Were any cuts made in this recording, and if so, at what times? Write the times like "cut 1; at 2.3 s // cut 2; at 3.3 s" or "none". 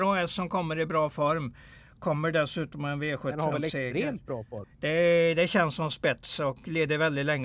cut 1; at 4.6 s

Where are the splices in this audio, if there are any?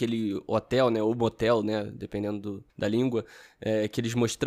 cut 1; at 2.7 s

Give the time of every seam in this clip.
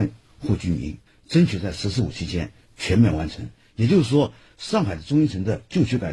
cut 1; at 4.5 s

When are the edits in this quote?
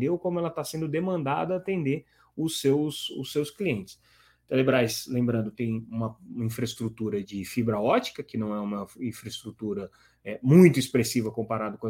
cut 1; at 7.2 s

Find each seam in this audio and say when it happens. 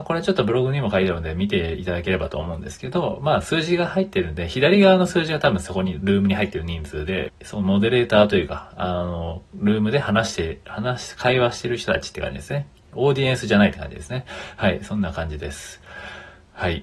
cut 1; at 7.3 s

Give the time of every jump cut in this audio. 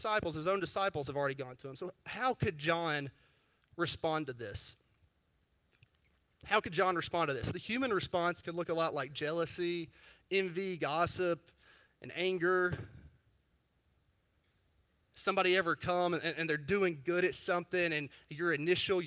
none

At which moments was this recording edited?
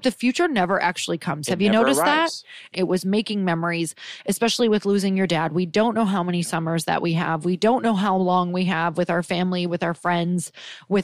cut 1; at 2.7 s

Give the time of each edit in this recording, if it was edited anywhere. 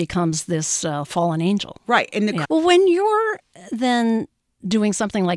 cut 1; at 2.4 s

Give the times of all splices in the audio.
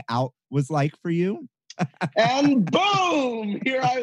cut 1; at 1.8 s

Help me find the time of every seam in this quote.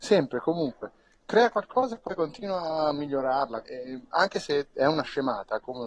cut 1; at 3.6 s

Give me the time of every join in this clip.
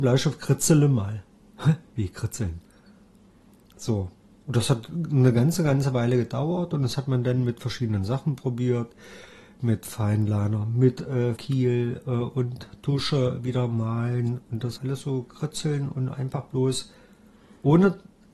cut 1; at 11.4 s // cut 2; at 14.8 s

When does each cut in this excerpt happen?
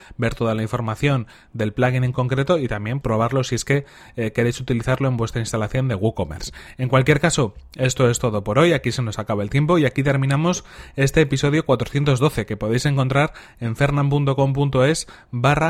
cut 1; at 3.0 s

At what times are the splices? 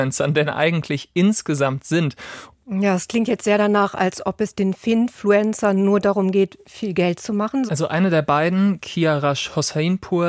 cut 1; at 2.5 s // cut 2; at 7.7 s

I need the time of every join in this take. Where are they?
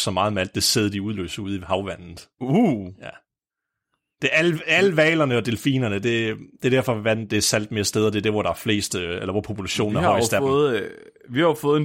none

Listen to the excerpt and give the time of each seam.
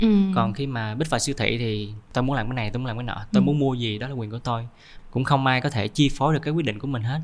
none

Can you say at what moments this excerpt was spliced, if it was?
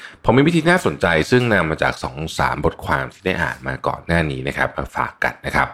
none

